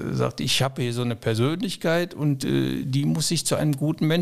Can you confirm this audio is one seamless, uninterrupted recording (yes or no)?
yes